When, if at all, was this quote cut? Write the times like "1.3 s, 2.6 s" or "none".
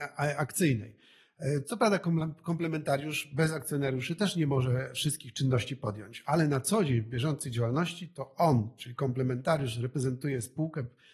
none